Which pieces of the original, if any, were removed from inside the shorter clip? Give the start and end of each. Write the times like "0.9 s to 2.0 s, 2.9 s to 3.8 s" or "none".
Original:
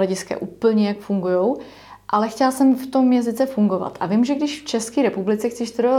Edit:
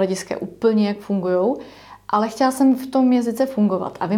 none

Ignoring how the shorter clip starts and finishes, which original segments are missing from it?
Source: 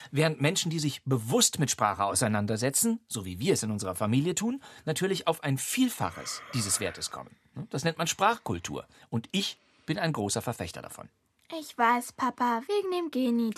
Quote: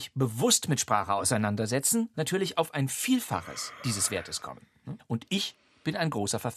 3.0 s to 4.8 s, 7.7 s to 9.0 s

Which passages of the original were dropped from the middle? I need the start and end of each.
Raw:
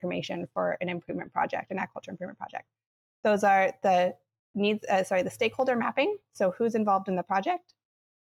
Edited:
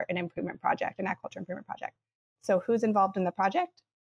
3.1 s to 6.3 s

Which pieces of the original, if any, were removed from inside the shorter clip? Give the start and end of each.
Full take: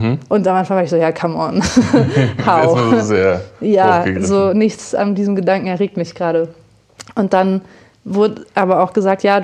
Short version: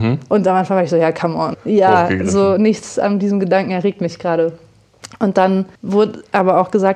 1.5 s to 3.5 s, 7.7 s to 8.0 s

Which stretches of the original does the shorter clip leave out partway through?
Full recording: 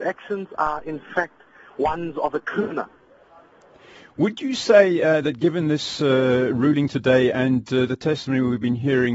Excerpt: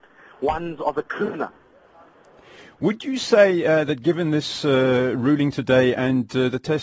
none

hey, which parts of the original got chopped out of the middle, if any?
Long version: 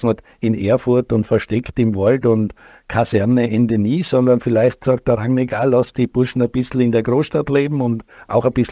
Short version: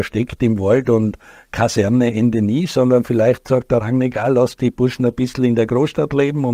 none

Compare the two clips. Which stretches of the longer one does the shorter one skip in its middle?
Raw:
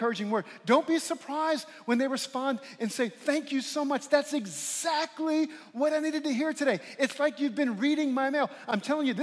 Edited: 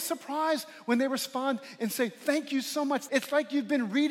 4.1 s to 7.0 s

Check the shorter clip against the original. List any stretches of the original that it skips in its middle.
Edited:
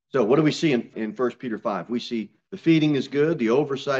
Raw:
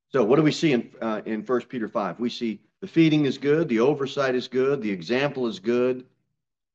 0.9 s to 1.2 s

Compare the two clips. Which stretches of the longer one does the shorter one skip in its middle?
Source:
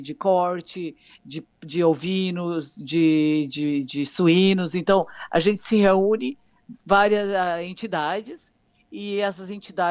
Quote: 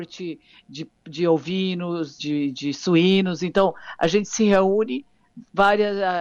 2.7 s to 3.5 s

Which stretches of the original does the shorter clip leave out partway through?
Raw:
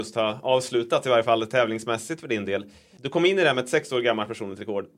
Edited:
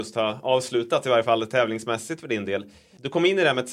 none

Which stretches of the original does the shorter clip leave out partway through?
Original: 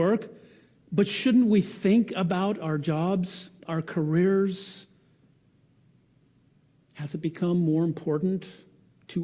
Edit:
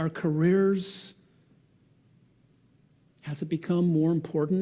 none

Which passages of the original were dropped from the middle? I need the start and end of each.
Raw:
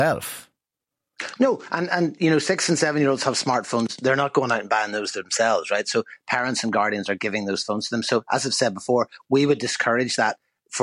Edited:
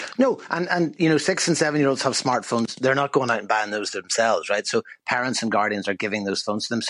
none

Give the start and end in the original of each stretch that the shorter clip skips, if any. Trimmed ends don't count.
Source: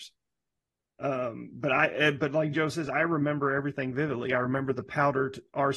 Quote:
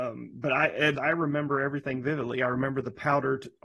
2.1 s to 2.9 s

